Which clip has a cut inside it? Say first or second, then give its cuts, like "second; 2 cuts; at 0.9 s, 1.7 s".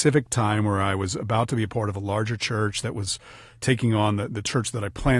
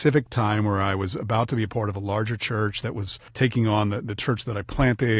second; 1 cut; at 3.3 s